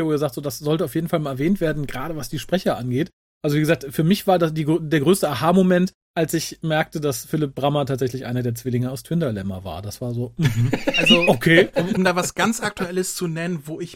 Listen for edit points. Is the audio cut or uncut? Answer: cut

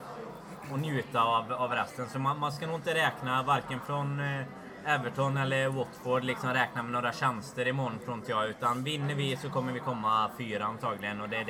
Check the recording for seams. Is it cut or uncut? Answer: uncut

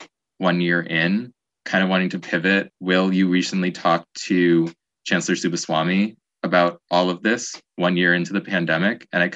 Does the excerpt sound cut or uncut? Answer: uncut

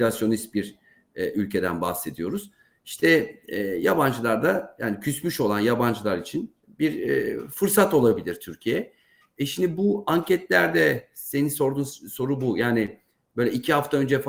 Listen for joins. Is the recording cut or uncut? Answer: uncut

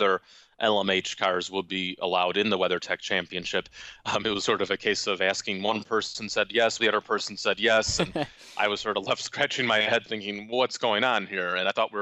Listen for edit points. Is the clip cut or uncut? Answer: cut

